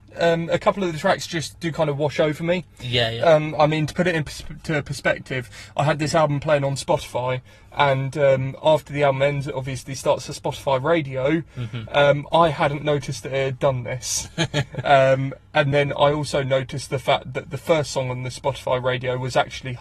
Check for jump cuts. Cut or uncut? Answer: uncut